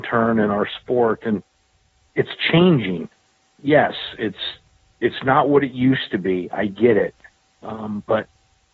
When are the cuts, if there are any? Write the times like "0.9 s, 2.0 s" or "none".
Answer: none

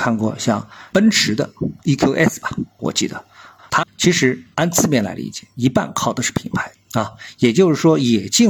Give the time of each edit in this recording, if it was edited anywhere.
3.8 s, 6.7 s

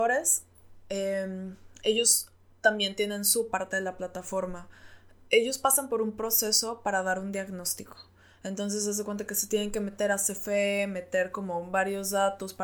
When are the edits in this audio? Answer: none

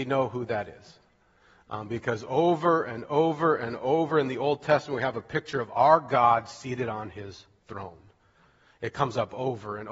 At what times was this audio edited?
none

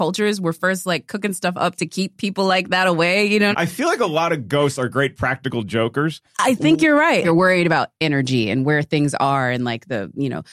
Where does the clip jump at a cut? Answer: 3.5 s, 7.2 s

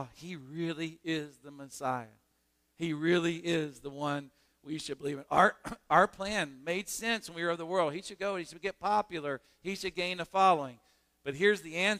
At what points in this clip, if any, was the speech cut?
none

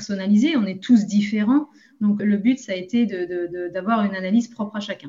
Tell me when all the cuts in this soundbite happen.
2.2 s

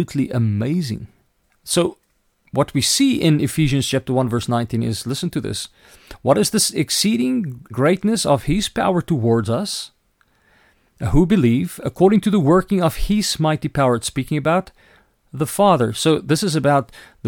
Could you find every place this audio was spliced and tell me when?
1.5 s, 7.7 s

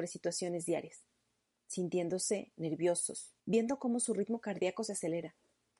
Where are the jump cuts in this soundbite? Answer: 3.4 s

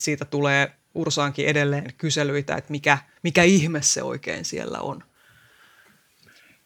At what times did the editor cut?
none

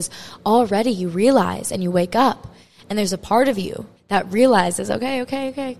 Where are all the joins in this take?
4.0 s

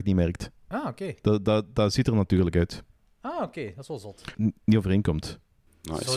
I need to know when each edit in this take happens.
4.3 s

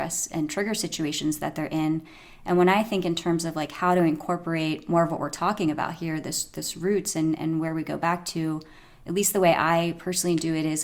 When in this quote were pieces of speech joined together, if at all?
none

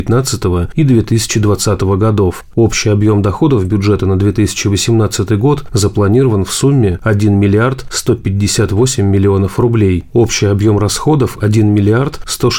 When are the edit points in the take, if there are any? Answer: none

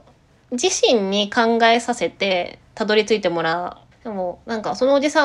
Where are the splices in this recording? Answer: 3.9 s

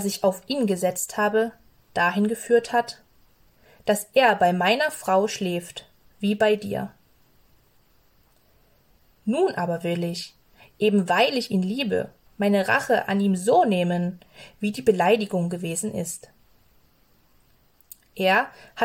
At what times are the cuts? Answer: none

